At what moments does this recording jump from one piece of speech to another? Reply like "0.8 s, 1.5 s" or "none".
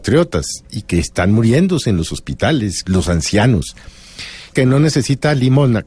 2.8 s, 4.5 s